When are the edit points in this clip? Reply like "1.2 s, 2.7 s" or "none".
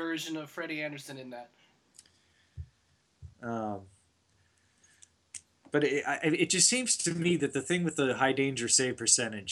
3.3 s